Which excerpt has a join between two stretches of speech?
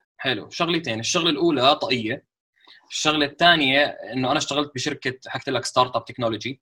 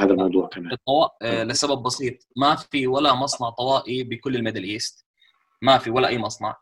second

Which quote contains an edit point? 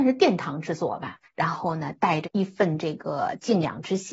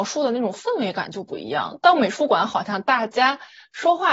first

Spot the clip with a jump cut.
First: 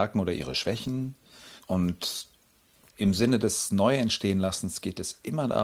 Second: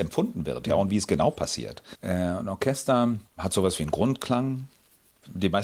second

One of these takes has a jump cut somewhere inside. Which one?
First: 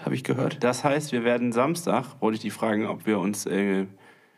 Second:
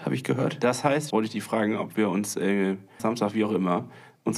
second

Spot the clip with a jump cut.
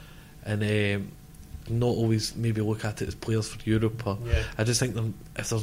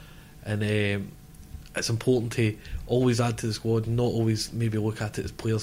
first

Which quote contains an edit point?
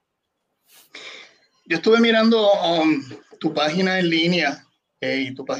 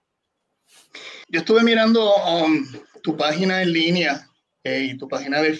second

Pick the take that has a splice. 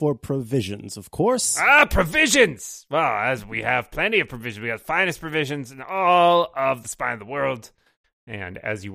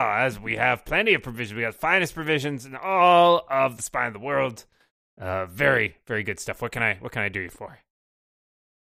first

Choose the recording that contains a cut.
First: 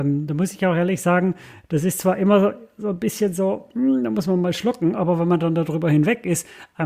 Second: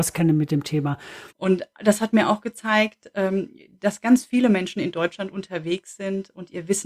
second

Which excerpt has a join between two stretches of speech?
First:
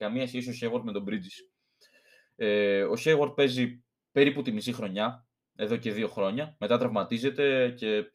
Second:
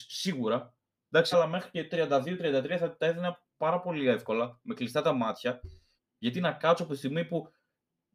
second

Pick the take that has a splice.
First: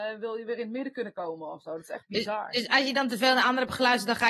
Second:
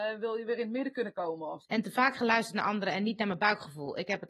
second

